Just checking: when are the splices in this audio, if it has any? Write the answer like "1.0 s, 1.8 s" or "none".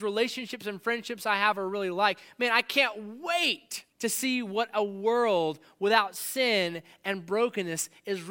3.9 s